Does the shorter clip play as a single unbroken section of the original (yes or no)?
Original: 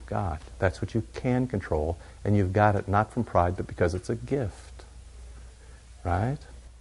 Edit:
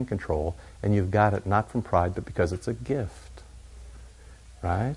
yes